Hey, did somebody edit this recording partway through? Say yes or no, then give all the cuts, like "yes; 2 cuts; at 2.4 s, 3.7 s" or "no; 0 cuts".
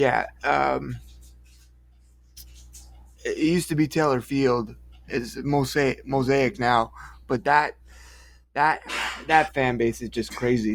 no; 0 cuts